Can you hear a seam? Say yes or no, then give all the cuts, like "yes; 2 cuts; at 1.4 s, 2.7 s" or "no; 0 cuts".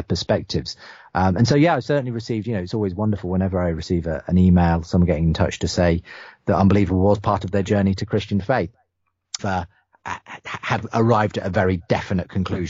yes; 1 cut; at 9.4 s